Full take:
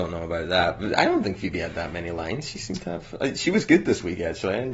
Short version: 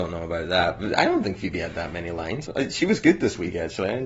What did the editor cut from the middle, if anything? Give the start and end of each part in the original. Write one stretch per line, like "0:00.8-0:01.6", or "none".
0:02.4-0:03.1